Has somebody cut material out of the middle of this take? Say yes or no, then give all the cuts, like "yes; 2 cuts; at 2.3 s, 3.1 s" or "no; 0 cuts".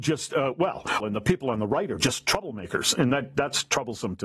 yes; 1 cut; at 1.0 s